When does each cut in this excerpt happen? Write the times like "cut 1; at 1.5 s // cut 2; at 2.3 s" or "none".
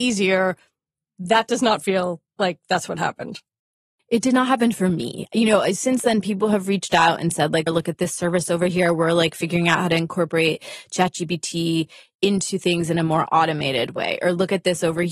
cut 1; at 7.7 s